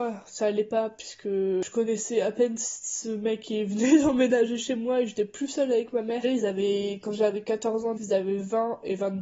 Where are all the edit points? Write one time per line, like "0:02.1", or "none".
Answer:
0:06.2
0:08.0

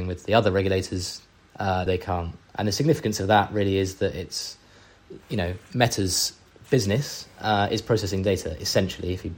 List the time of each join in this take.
0:01.9

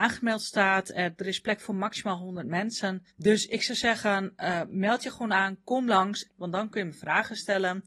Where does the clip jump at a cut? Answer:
0:03.1
0:06.3

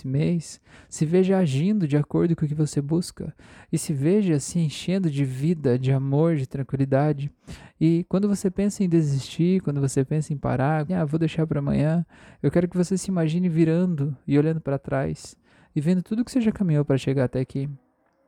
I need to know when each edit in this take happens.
0:10.9

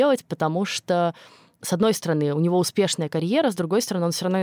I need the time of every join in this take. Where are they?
none

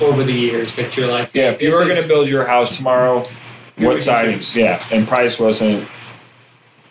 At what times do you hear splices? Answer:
0:02.7

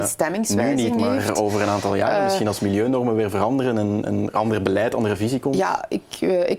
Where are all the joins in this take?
none

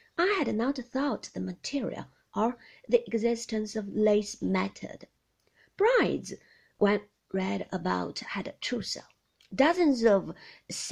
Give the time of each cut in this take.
none

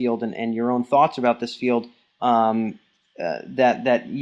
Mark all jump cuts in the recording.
none

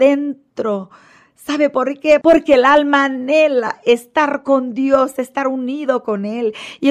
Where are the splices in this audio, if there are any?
0:02.2

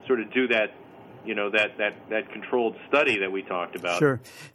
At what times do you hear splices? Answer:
none

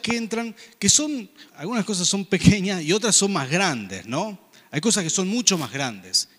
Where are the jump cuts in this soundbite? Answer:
0:01.5

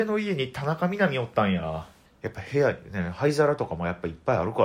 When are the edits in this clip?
0:02.1

